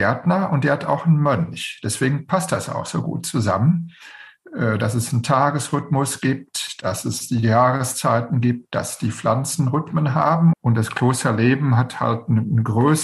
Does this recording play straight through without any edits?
no; 1 cut; at 10.5 s

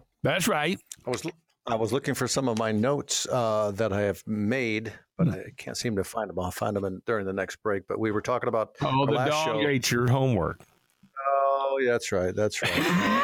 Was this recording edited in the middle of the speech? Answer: no; 0 cuts

